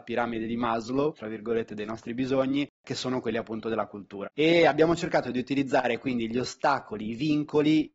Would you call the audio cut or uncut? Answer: cut